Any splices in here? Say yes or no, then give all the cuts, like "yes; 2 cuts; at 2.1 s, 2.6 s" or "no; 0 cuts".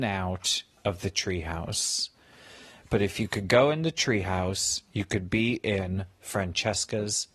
yes; 1 cut; at 2.8 s